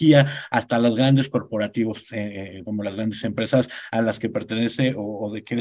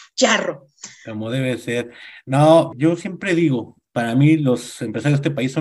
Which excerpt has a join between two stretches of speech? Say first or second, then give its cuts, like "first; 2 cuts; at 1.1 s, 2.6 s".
second; 2 cuts; at 2.7 s, 3.9 s